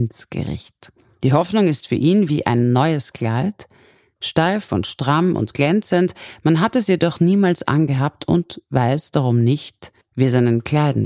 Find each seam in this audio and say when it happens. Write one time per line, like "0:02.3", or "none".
none